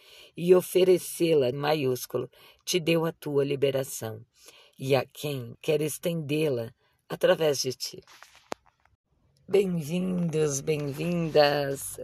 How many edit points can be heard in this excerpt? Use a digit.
2